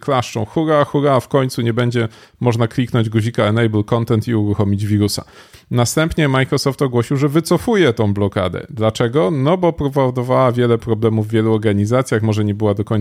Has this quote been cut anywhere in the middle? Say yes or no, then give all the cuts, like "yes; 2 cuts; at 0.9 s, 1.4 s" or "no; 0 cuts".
no; 0 cuts